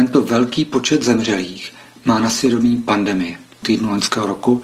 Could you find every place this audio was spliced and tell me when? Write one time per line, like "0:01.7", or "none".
0:03.6